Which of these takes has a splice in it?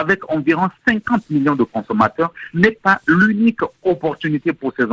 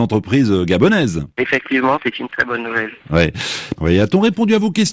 second; 2 cuts; at 1.3 s, 3.8 s

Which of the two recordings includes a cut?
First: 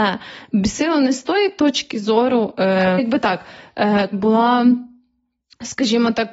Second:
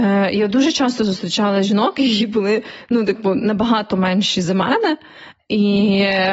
first; 2 cuts; at 3.0 s, 4.1 s

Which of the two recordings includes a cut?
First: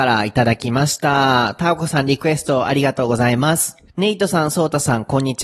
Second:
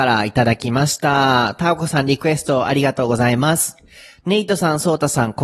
first; 1 cut; at 3.9 s

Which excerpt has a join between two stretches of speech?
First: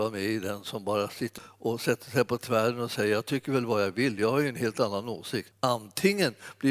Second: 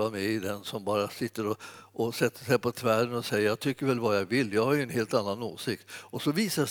first; 2 cuts; at 1.4 s, 5.5 s

